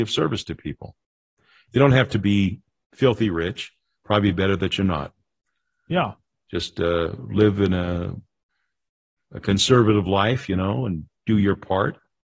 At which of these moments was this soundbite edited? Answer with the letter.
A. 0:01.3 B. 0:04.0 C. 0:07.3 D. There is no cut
D